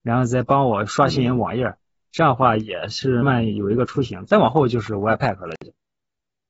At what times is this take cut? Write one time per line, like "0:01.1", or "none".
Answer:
0:03.2

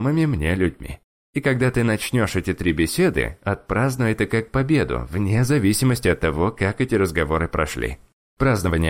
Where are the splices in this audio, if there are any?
none

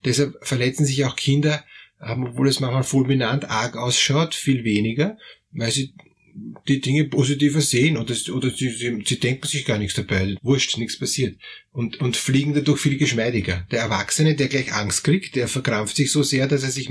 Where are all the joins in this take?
0:10.4

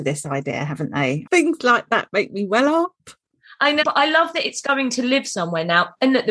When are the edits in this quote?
0:01.2
0:03.8

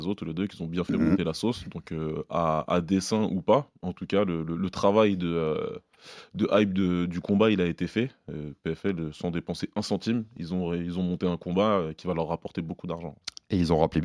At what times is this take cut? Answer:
none

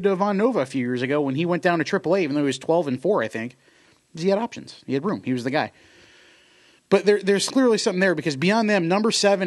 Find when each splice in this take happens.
none

